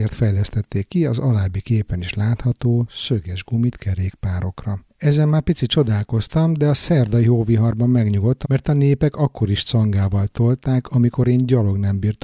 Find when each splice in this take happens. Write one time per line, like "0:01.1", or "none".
0:04.9
0:08.4